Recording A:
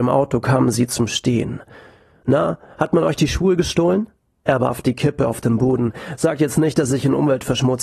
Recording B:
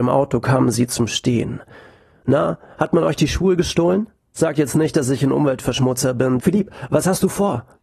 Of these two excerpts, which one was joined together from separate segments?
B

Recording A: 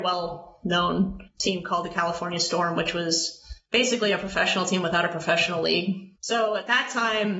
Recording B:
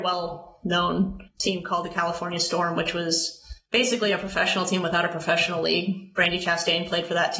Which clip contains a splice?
A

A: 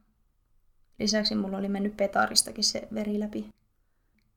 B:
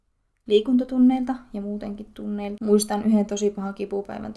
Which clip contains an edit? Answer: B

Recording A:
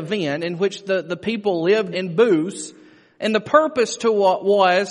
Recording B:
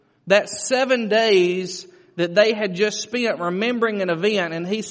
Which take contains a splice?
A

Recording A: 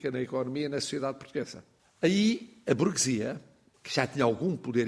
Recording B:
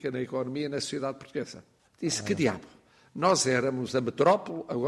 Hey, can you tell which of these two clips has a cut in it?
B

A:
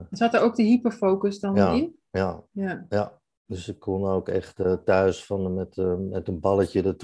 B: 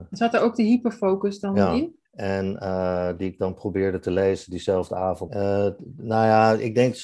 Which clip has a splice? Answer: B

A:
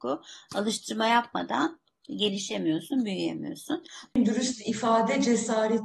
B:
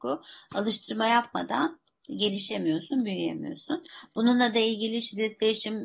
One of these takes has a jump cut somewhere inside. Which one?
A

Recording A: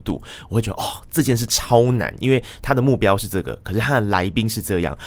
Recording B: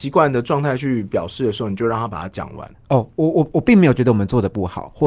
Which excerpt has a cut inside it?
B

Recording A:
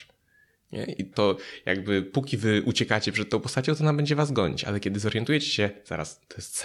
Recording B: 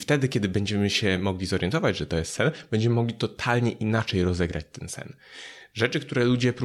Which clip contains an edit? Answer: A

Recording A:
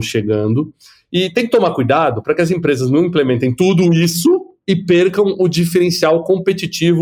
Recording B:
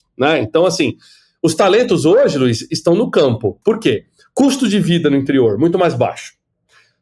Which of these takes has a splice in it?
B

